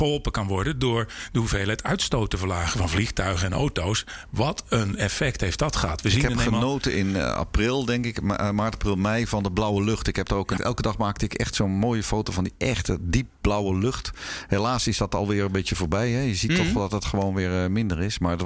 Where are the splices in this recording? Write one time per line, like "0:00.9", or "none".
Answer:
0:10.6